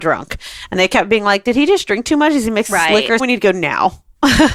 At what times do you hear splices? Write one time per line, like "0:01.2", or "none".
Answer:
0:03.2